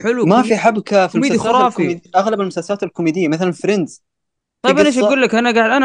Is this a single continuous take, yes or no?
yes